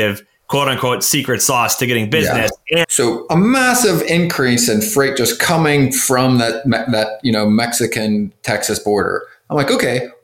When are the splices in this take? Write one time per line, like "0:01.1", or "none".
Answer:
0:02.8